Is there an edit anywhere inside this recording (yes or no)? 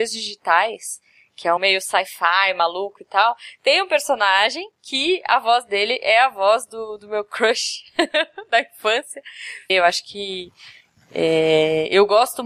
yes